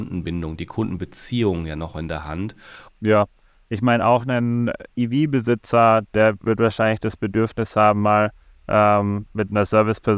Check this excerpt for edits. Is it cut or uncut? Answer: cut